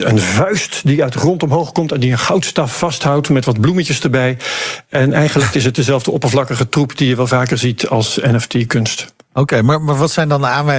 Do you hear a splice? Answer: yes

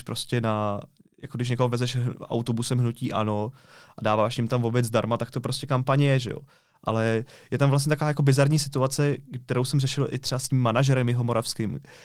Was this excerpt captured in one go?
yes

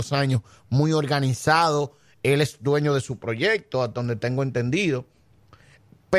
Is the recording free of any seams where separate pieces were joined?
yes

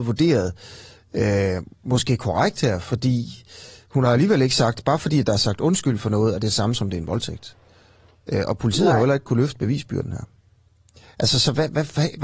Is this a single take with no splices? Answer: yes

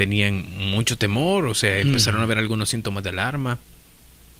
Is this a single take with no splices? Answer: yes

